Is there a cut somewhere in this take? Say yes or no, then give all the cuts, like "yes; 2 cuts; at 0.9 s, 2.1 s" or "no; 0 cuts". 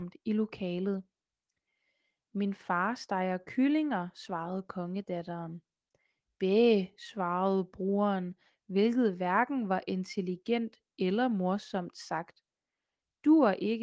no; 0 cuts